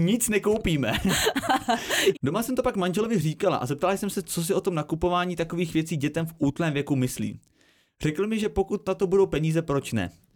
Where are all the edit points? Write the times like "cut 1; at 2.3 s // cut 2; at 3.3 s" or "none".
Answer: cut 1; at 2.1 s